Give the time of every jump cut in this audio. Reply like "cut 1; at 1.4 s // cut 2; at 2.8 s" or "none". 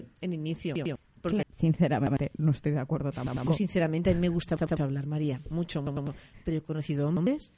cut 1; at 1.4 s